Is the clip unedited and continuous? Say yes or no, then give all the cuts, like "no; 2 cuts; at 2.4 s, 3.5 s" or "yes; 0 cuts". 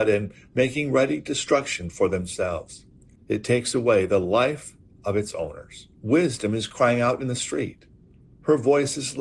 no; 2 cuts; at 3.1 s, 6.0 s